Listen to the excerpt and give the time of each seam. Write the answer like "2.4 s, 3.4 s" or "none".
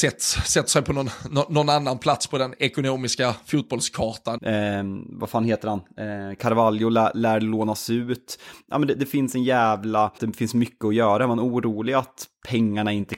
4.4 s, 10.2 s